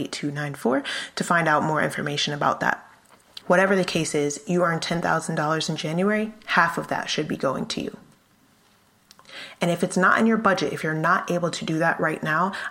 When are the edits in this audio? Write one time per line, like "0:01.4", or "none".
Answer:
0:03.4